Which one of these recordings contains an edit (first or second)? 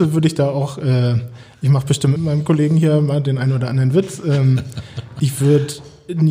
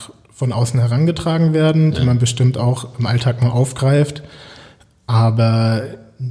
first